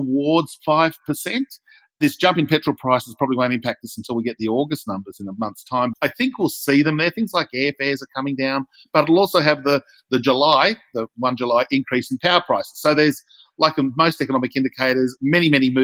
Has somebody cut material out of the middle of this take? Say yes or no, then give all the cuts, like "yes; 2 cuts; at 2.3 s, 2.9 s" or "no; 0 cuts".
yes; 1 cut; at 5.9 s